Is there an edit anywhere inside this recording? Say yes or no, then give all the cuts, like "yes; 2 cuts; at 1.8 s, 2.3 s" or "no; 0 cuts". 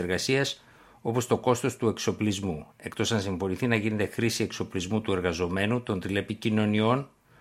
no; 0 cuts